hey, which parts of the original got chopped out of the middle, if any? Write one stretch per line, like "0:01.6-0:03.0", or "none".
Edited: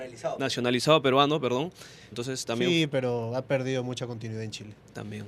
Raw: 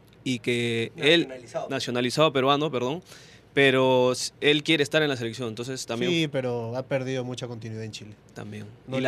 0:03.4-0:05.5